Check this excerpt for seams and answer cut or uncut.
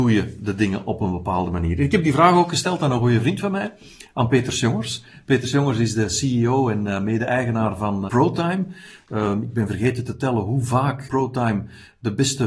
cut